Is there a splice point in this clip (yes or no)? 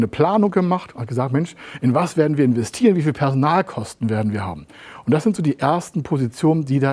no